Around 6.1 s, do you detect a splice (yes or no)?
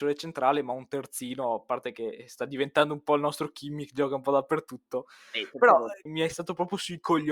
yes